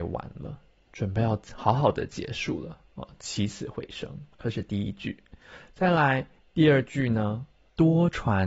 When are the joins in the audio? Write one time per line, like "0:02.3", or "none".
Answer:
0:04.3